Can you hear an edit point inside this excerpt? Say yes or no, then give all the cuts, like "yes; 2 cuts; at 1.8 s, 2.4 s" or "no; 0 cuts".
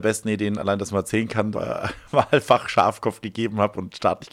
yes; 1 cut; at 1.5 s